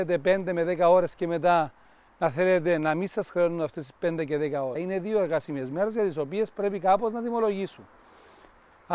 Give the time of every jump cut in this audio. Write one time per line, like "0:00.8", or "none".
0:04.8